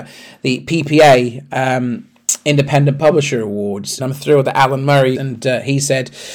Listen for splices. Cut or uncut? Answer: cut